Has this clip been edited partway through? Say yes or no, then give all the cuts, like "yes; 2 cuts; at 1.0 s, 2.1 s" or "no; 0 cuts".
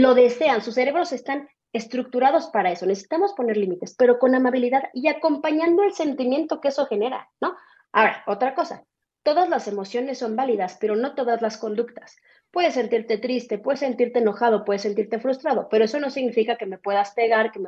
no; 0 cuts